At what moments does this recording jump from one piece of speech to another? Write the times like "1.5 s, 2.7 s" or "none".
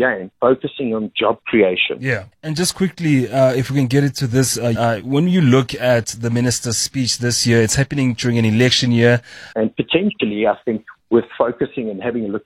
2.3 s, 4.8 s, 9.5 s

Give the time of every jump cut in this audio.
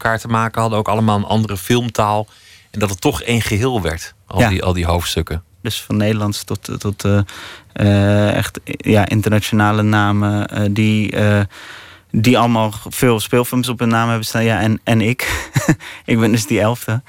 5.6 s

